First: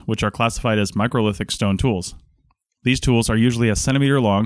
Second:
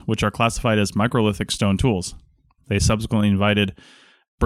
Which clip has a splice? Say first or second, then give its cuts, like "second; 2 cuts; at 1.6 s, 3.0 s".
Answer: second; 1 cut; at 2.6 s